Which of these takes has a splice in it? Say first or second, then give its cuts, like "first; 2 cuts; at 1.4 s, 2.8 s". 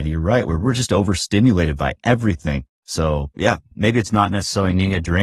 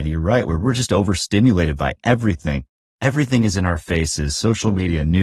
first; 1 cut; at 2.8 s